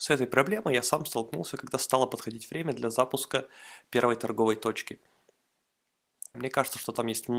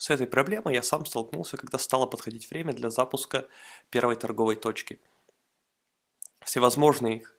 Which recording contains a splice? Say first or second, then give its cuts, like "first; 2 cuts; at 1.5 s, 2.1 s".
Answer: first; 1 cut; at 6.3 s